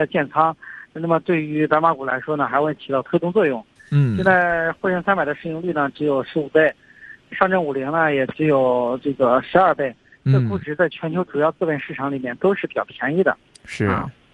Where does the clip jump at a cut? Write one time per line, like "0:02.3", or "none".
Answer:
0:03.8